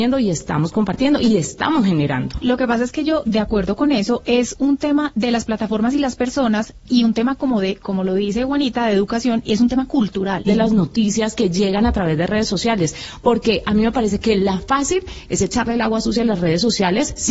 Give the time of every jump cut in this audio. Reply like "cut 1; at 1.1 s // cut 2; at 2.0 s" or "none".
cut 1; at 10.5 s